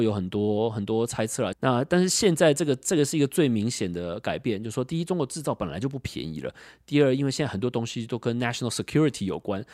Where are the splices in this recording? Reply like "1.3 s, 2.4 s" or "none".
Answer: 1.5 s

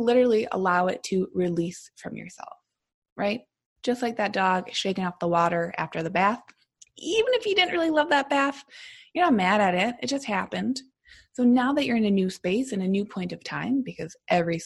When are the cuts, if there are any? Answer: none

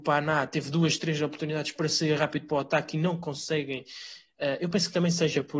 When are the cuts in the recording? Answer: none

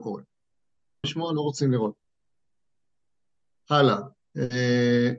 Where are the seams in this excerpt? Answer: 1.0 s

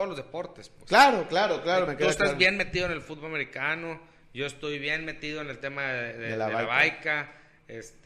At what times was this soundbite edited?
none

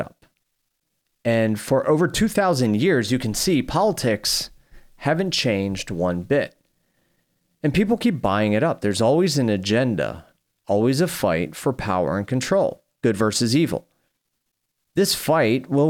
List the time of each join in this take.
none

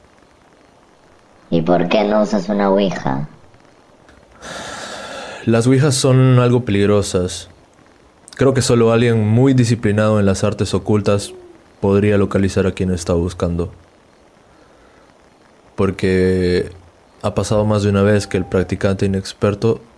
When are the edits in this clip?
none

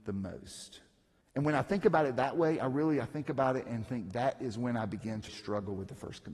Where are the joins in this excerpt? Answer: 1.2 s, 5.3 s

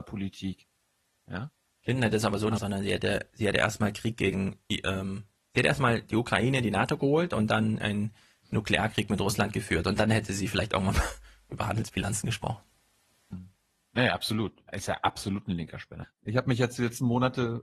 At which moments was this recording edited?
2.6 s, 13.3 s, 16.0 s

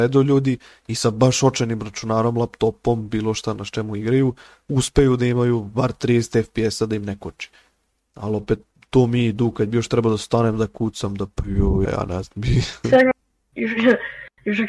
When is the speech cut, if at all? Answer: 11.9 s

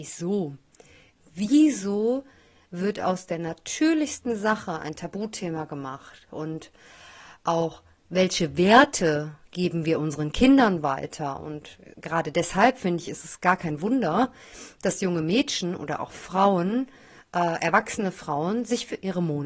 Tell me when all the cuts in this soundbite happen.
none

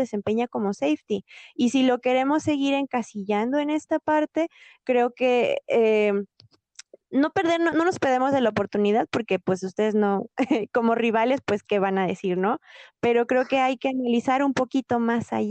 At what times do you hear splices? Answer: none

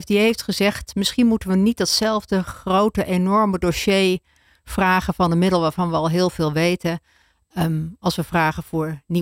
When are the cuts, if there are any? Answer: none

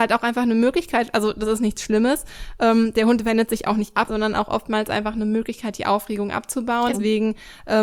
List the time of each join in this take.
4.1 s, 6.9 s

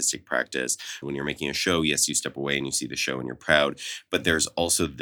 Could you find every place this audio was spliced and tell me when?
1.0 s

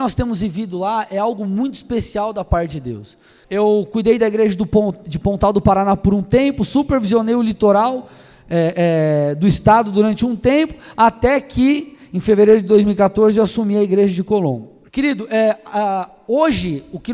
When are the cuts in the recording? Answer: 3.4 s, 14.9 s

